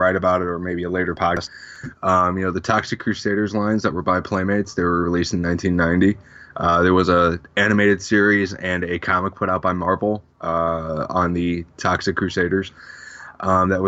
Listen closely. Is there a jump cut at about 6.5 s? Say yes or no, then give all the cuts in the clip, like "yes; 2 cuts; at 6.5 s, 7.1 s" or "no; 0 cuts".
no; 1 cut; at 1.9 s